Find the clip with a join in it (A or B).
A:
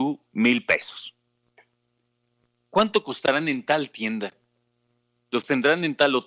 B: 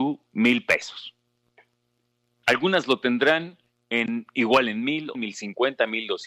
B